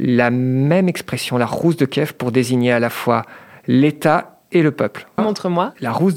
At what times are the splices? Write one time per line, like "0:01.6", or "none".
0:05.2